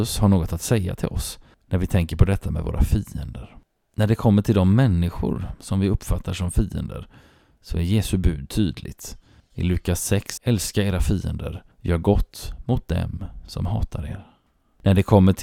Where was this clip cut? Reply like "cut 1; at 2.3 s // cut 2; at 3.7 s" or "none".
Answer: cut 1; at 10.4 s // cut 2; at 11.7 s